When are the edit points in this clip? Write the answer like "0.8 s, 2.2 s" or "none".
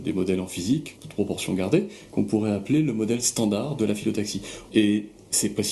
1.0 s, 4.7 s